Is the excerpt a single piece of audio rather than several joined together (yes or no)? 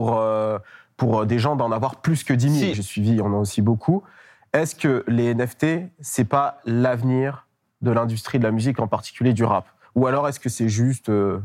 no